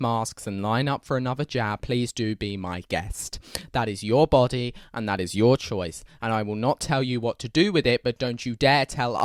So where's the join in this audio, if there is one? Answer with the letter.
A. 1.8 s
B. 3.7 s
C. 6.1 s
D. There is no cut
A